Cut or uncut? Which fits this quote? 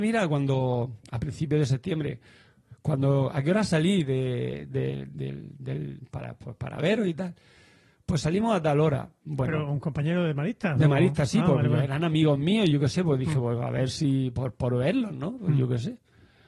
uncut